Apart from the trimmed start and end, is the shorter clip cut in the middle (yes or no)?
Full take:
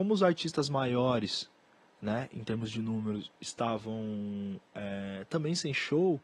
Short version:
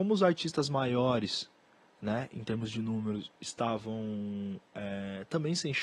no